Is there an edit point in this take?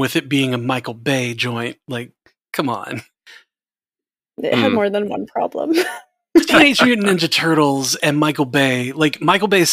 no; 0 cuts

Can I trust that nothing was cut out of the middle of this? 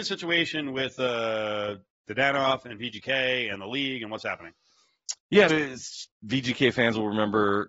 no; 1 cut; at 5.5 s

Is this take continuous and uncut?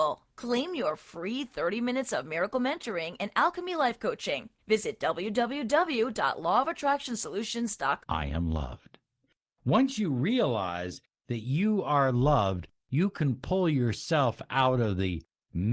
no; 1 cut; at 8.0 s

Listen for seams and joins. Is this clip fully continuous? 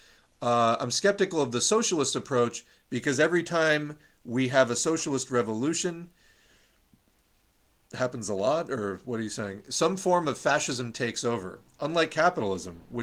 yes; 0 cuts

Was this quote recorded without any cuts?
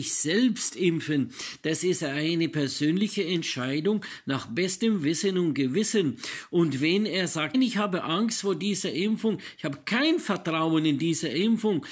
no; 1 cut; at 7.5 s

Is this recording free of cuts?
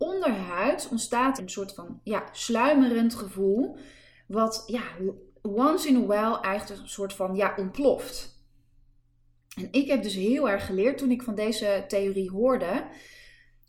no; 1 cut; at 1.4 s

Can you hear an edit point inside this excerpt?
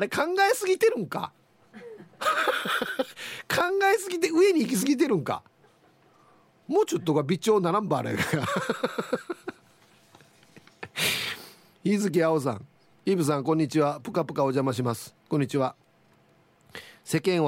no; 0 cuts

